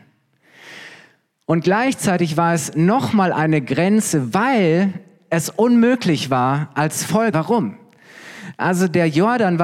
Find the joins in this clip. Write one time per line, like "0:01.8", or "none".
0:07.3